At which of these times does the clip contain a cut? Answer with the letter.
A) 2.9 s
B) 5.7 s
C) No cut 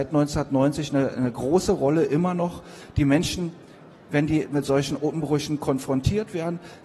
C